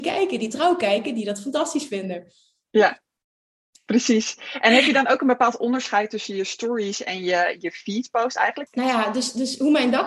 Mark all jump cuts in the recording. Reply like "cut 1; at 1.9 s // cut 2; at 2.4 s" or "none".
cut 1; at 8.7 s